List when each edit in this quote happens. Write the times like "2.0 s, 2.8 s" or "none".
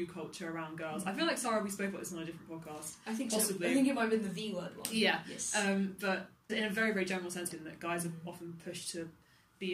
6.5 s, 7.5 s